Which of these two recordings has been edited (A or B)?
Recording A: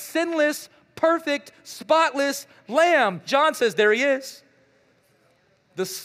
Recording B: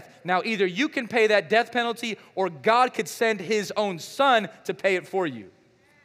A